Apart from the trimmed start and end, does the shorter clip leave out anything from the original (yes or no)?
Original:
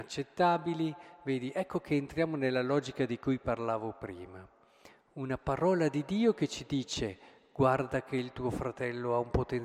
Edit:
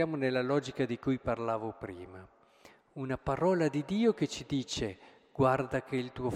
no